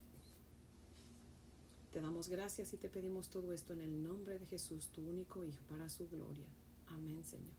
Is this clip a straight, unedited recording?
no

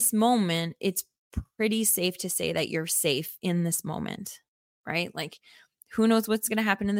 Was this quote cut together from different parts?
no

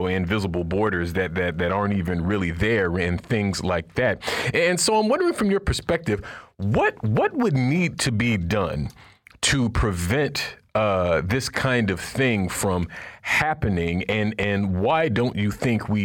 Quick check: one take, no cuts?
yes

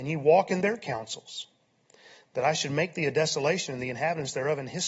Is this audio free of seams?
yes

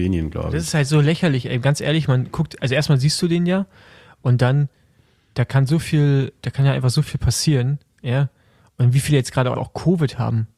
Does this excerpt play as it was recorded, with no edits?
no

